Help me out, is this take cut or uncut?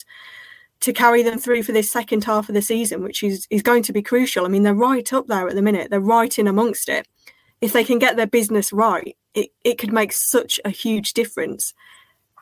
uncut